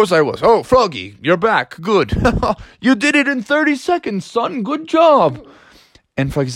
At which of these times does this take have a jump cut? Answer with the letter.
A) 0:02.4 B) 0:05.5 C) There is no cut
C